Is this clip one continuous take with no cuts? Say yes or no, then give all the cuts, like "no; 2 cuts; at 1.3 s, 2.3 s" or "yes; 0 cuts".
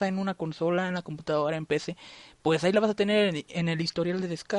yes; 0 cuts